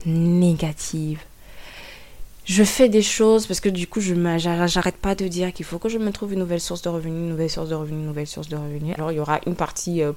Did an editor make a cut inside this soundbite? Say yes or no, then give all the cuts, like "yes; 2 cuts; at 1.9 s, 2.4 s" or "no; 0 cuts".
yes; 1 cut; at 9.0 s